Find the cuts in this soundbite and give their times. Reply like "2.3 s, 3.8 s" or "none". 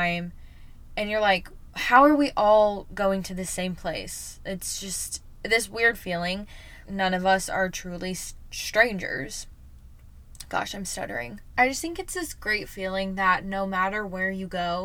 6.8 s, 11.5 s